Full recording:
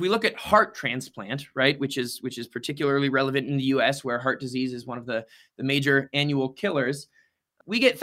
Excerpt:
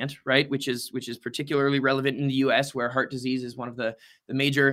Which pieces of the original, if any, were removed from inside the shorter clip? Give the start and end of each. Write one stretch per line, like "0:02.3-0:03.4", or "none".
none